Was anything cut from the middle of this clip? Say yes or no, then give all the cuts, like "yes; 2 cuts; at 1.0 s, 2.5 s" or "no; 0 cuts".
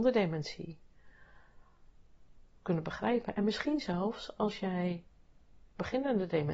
yes; 1 cut; at 2.6 s